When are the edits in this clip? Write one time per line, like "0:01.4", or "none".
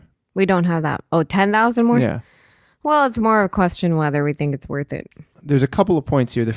none